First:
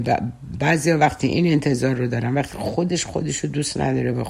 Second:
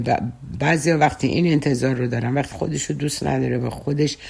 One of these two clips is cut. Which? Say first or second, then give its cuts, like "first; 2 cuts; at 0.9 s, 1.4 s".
second; 1 cut; at 2.5 s